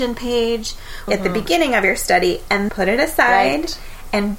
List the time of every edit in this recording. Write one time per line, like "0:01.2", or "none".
0:01.1
0:02.7